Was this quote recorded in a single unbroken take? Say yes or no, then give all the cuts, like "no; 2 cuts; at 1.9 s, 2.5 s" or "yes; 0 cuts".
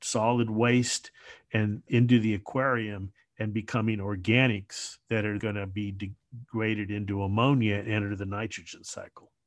no; 2 cuts; at 1.9 s, 5.4 s